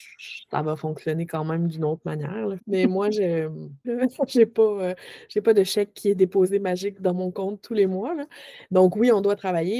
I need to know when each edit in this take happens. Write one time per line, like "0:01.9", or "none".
0:02.6
0:03.8